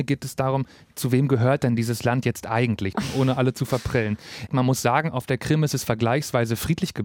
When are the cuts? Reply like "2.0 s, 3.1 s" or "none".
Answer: 2.9 s, 4.5 s